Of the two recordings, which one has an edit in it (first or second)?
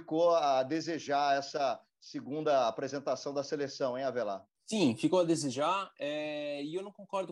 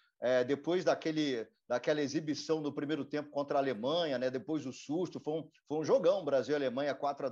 first